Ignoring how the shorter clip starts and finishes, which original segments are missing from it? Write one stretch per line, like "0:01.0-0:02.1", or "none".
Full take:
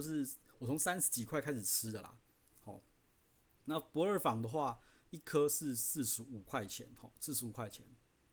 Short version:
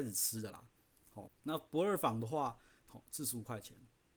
0:02.8-0:03.5
0:05.1-0:07.0